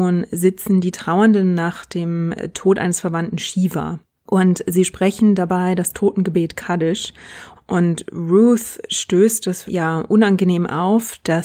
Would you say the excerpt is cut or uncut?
cut